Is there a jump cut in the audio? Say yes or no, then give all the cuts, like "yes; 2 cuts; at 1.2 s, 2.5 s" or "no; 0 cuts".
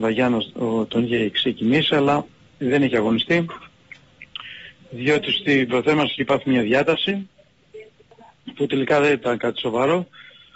no; 0 cuts